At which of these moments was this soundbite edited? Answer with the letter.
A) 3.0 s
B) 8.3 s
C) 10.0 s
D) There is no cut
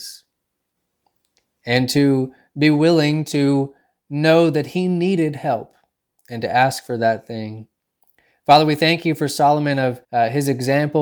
C